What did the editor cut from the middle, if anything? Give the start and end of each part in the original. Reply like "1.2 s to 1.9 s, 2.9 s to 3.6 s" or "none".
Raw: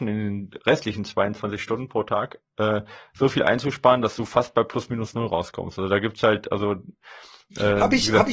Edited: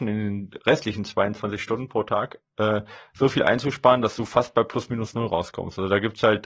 none